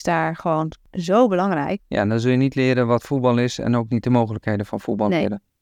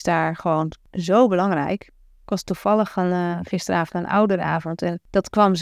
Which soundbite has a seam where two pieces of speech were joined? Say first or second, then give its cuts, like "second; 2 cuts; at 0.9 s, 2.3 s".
first; 1 cut; at 1.8 s